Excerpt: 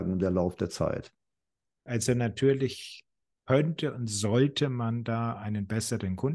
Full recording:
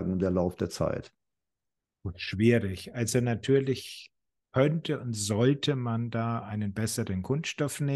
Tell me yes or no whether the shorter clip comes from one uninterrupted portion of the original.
no